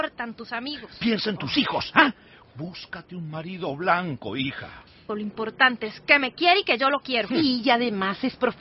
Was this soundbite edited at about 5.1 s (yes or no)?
yes